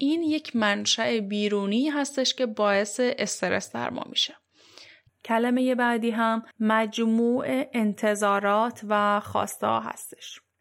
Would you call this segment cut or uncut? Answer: cut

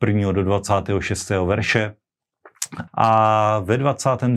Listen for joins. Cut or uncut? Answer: cut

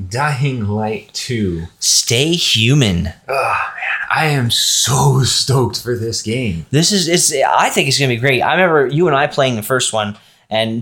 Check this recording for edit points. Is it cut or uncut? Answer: uncut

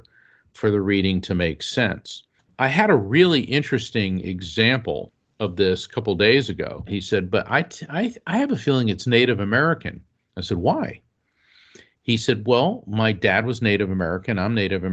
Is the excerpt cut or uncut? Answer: cut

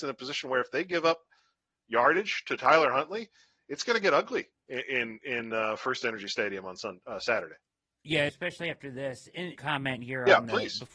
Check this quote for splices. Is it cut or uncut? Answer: cut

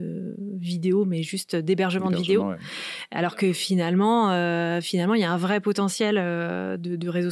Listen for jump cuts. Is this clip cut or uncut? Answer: uncut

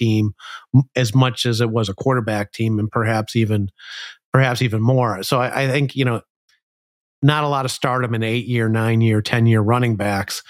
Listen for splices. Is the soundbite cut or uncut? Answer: uncut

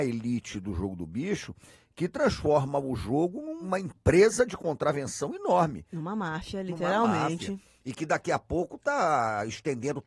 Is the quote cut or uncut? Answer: uncut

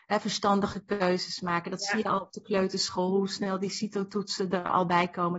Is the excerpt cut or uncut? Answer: uncut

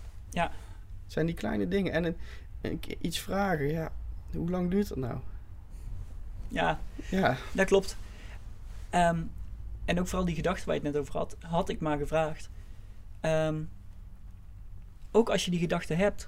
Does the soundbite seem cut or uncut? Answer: cut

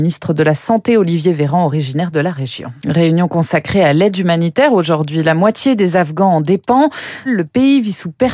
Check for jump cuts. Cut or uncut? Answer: cut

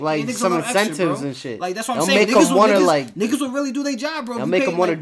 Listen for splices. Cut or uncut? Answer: uncut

